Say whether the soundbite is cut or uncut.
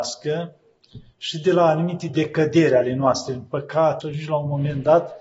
cut